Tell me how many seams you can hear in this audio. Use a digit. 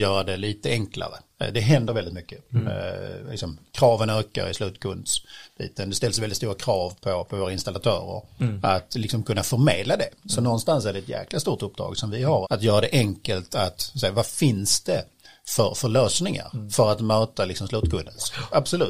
1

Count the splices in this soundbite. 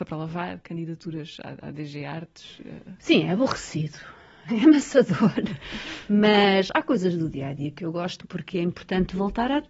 2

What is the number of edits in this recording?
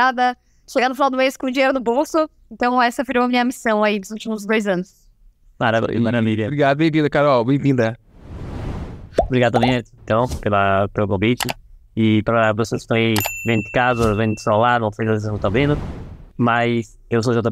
0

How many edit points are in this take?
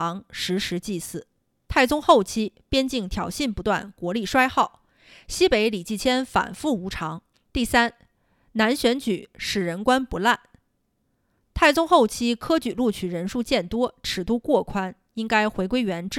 1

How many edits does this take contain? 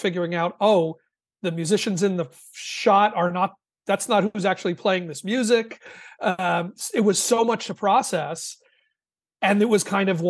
0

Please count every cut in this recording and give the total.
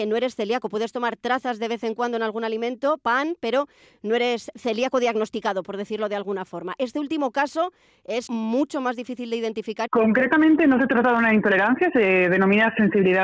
2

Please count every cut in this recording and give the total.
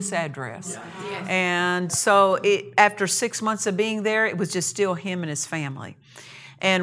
1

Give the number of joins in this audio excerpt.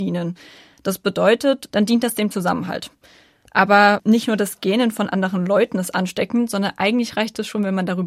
1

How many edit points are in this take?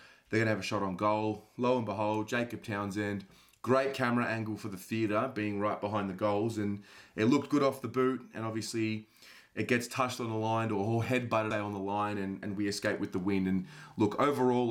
1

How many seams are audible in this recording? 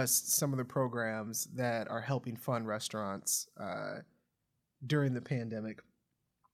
0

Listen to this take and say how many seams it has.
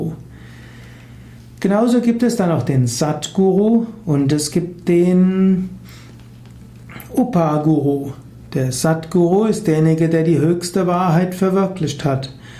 0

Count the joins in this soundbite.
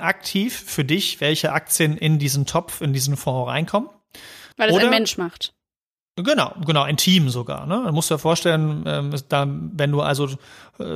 1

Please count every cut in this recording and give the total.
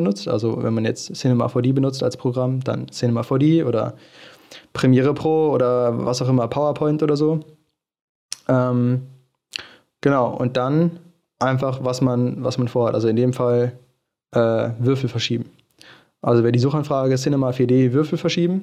0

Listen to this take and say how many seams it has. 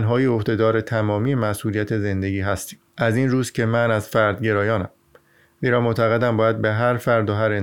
1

